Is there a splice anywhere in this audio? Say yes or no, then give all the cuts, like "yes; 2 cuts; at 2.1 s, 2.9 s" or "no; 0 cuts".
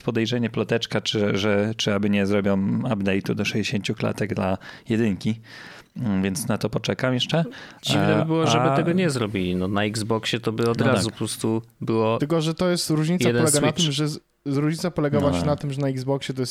no; 0 cuts